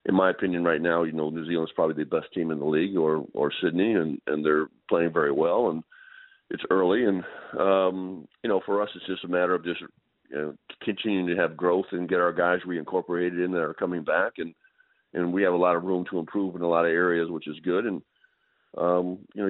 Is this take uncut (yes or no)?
yes